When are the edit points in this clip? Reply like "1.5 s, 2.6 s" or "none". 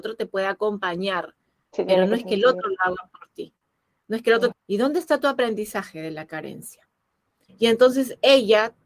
4.5 s, 7.5 s